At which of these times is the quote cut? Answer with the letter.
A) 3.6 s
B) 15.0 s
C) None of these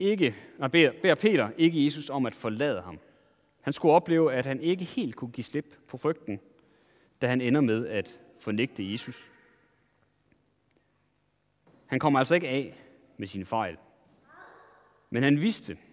A